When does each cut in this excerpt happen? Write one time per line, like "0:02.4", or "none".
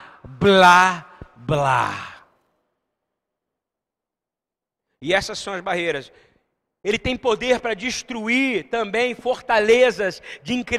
none